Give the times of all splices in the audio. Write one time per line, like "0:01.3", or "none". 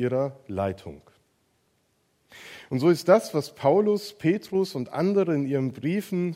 none